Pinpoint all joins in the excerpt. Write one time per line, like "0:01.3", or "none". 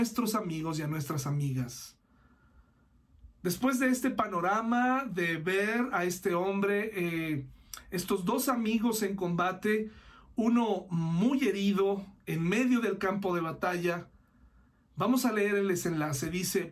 none